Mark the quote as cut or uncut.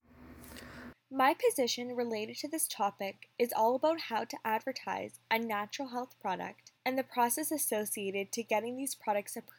cut